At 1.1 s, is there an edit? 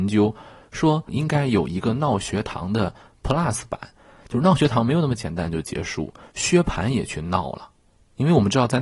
yes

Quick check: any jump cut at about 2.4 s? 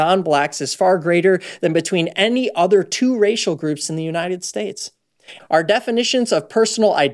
no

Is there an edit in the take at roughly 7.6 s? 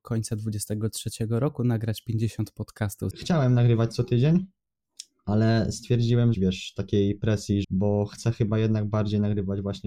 yes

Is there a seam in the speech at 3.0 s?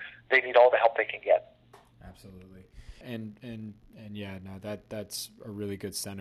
yes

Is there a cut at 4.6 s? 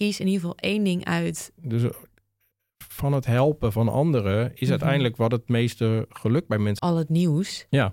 no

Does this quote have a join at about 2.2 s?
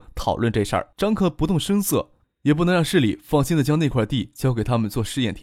yes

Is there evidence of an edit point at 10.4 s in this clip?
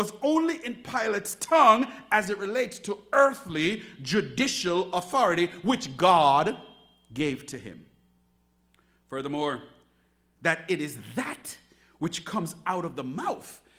yes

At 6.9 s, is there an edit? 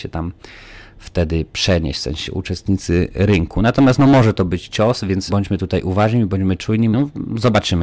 yes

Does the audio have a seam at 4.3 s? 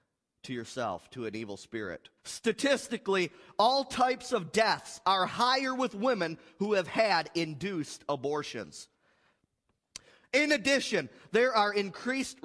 no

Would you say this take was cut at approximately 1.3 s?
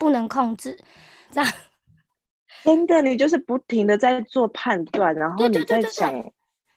yes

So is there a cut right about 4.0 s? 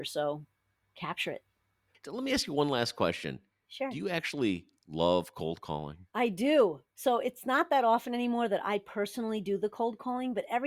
no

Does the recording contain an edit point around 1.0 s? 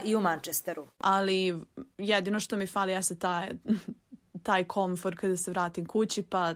yes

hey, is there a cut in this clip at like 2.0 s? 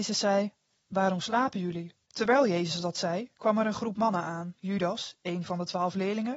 yes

